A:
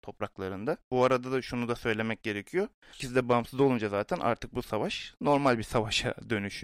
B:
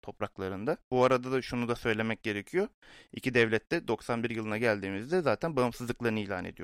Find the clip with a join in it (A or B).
A